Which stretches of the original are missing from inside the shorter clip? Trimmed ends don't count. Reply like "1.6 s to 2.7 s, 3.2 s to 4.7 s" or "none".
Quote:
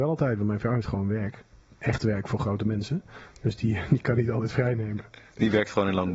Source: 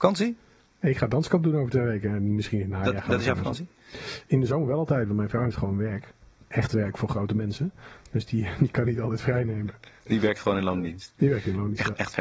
none

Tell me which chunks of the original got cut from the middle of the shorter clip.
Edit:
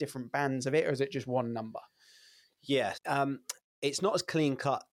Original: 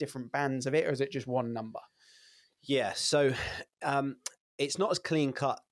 2.9 s to 3.7 s

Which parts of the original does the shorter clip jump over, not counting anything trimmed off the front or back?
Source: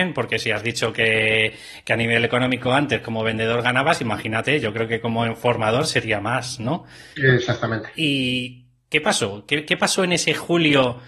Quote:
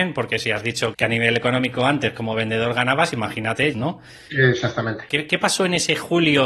0.9 s to 1.8 s, 4.6 s to 6.6 s, 7.9 s to 9.5 s

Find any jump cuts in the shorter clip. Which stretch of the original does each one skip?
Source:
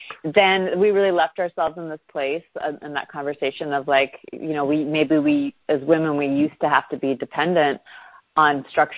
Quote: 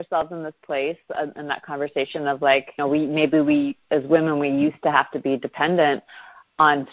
4.2 s to 4.6 s

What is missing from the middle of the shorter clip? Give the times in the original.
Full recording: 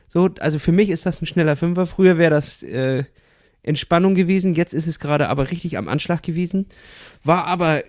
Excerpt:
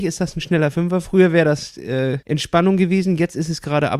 3.1 s to 3.6 s

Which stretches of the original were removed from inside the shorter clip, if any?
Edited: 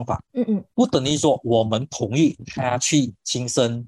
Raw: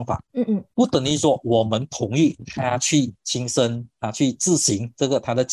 none

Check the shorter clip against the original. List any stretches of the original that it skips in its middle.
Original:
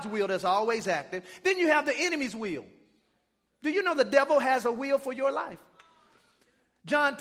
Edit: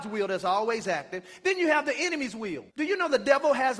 2.7 s to 3.6 s

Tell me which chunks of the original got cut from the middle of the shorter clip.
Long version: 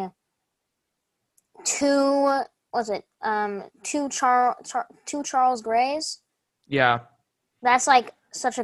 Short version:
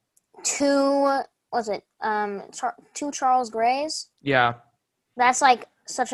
3.7 s to 4.6 s, 6.2 s to 6.6 s

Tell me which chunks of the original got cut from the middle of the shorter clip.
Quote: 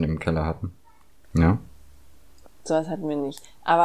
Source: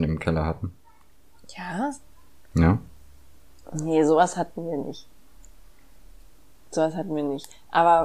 1.2 s to 2.4 s, 3.7 s to 6.5 s

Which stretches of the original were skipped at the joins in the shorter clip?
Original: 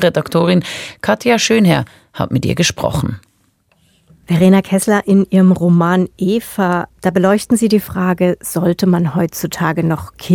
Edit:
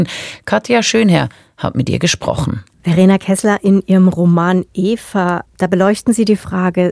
3.3 s to 4.2 s

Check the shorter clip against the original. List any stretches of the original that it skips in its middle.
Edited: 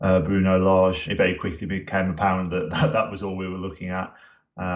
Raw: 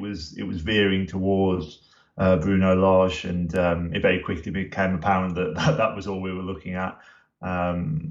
3.2 s to 3.9 s

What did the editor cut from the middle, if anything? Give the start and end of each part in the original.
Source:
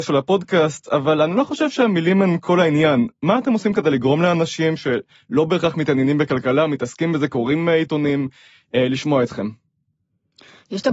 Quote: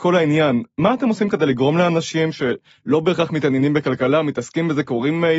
none

